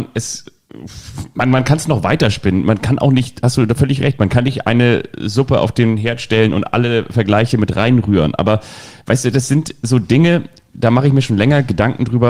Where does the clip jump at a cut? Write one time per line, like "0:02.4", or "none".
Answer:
none